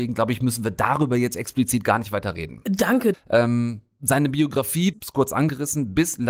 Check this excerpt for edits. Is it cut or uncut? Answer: cut